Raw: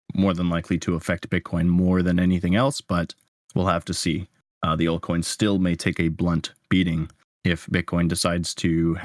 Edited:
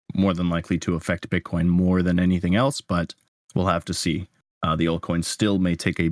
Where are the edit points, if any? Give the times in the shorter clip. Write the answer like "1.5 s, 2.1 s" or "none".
none